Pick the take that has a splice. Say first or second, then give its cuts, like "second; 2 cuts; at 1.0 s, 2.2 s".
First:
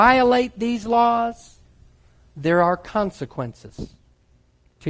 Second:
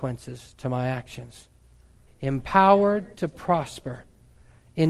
second; 1 cut; at 2.1 s